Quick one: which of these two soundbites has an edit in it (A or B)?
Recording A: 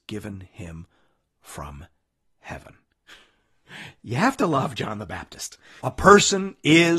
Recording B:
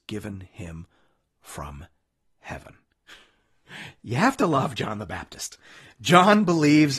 A